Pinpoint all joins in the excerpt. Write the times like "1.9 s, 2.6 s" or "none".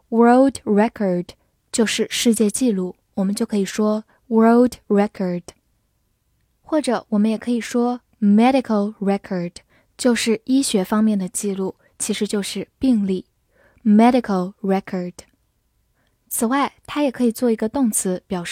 3.1 s